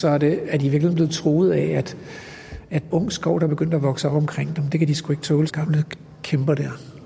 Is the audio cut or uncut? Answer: cut